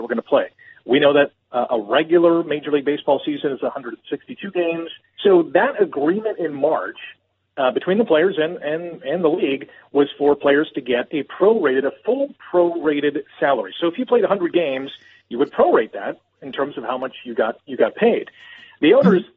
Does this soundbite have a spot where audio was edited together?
yes; 1 cut; at 5.2 s

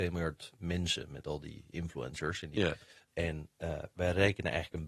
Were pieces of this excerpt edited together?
yes; 1 cut; at 3.1 s

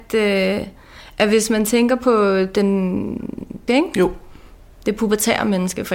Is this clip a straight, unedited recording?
no; 1 cut; at 3.7 s

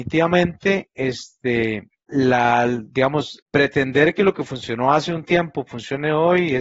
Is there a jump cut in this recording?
yes; 2 cuts; at 2.1 s, 3.4 s

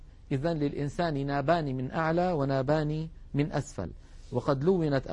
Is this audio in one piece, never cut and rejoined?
yes; 0 cuts

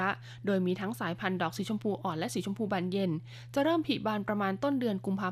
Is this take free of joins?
yes; 0 cuts

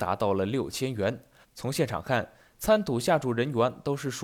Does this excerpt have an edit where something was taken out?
yes; 1 cut; at 1.4 s

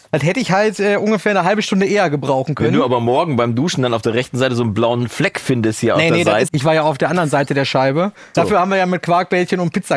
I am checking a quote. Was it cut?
yes; 2 cuts; at 6.5 s, 8.3 s

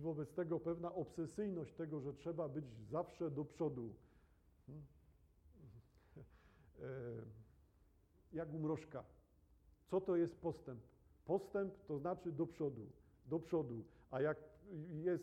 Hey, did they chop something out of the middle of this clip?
no; 0 cuts

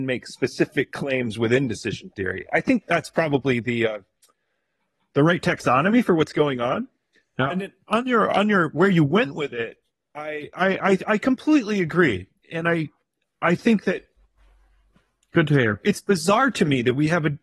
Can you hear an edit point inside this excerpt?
no; 0 cuts

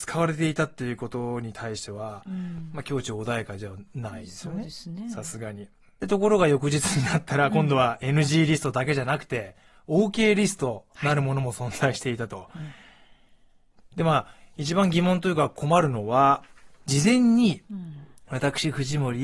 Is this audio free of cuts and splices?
no; 3 cuts; at 6.0 s, 13.8 s, 16.7 s

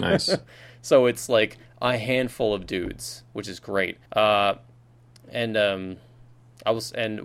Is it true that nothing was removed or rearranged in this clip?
no; 1 cut; at 4.1 s

